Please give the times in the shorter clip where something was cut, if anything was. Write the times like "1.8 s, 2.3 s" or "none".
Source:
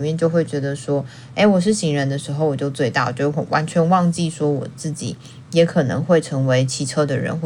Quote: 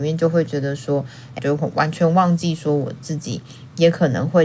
1.4 s